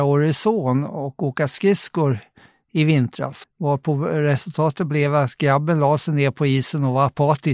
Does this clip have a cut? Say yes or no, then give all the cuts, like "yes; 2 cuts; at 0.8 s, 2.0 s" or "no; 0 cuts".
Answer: yes; 1 cut; at 3.4 s